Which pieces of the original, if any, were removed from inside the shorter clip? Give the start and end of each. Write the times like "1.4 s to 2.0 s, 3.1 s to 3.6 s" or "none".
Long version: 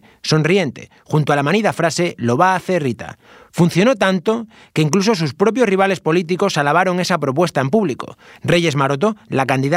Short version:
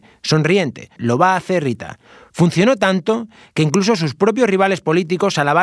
1.0 s to 2.2 s